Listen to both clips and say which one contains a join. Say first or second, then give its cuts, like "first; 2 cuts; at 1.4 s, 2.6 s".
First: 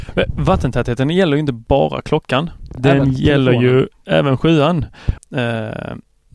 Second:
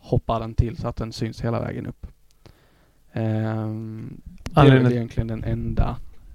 first; 2 cuts; at 2.7 s, 5.2 s